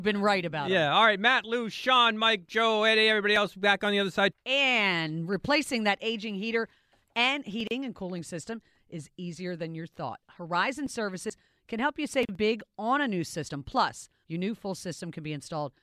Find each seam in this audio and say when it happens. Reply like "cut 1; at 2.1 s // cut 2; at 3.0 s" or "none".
cut 1; at 4.3 s // cut 2; at 14.2 s